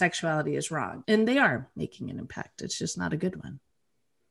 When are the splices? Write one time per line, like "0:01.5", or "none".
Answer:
0:01.0